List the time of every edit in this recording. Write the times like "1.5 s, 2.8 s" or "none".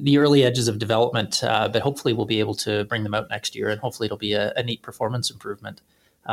none